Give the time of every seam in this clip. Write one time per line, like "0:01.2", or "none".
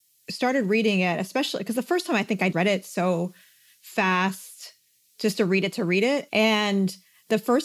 0:02.5
0:06.3